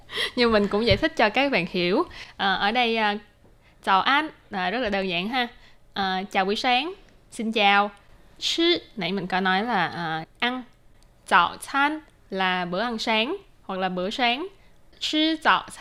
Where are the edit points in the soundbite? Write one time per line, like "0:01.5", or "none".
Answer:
none